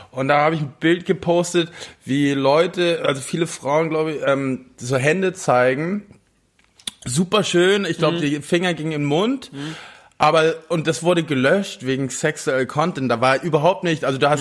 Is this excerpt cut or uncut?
uncut